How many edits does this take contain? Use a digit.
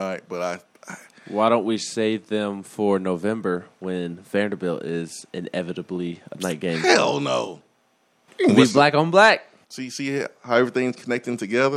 2